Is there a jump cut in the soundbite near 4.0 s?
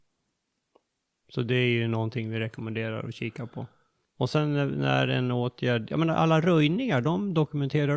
yes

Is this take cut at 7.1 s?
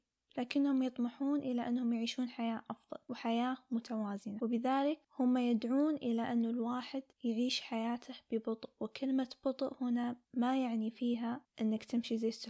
yes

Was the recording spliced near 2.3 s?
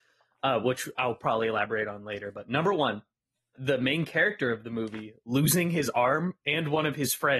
no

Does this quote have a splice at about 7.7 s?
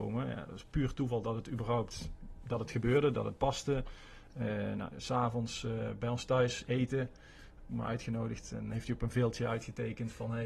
no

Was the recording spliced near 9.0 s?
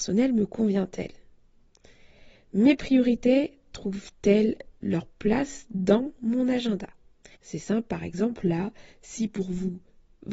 no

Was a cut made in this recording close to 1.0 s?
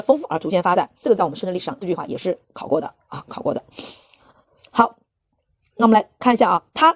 yes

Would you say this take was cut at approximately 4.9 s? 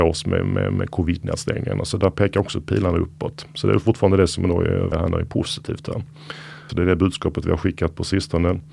yes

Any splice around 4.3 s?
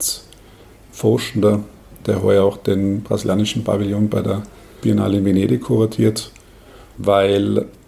no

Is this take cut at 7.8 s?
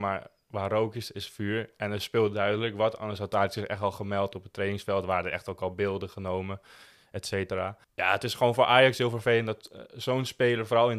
yes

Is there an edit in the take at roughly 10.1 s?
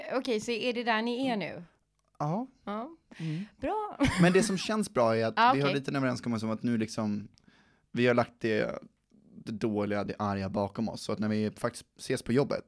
yes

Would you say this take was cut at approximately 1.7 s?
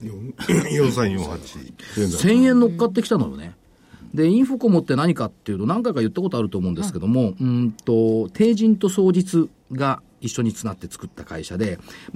yes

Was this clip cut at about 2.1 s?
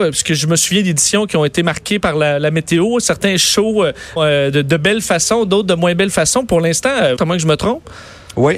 no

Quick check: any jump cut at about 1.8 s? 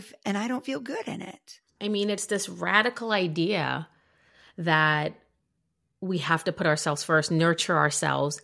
yes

